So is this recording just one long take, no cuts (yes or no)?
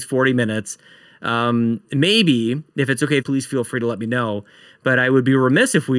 no